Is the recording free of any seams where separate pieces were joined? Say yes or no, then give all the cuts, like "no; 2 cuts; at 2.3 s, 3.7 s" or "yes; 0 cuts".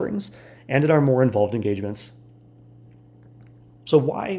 yes; 0 cuts